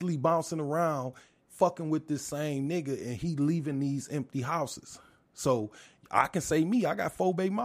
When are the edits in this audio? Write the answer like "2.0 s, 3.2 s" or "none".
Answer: none

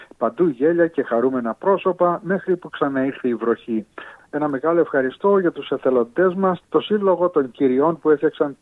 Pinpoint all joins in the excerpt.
4.2 s, 6.6 s

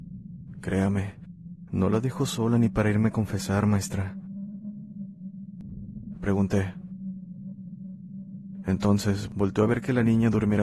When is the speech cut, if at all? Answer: 6.1 s

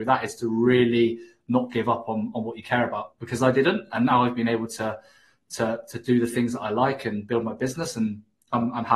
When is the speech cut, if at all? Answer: none

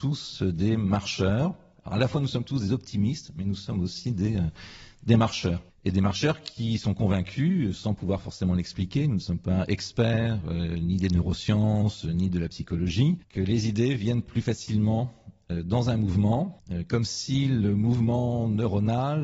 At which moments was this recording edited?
none

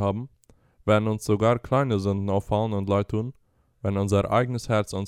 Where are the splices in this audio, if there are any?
3.7 s

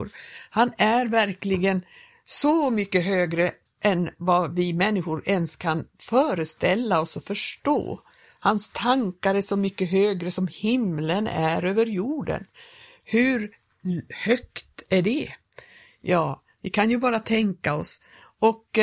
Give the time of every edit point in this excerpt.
none

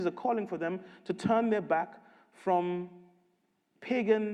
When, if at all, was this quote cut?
none

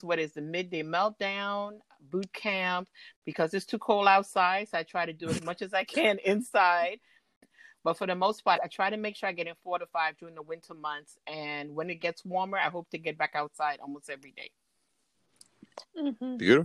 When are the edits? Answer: 8.6 s

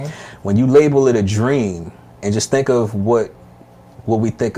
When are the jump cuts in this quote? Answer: 2.2 s

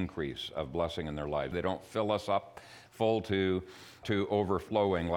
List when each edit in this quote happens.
1.5 s, 4.0 s

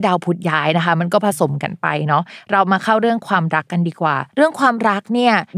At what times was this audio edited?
4.3 s

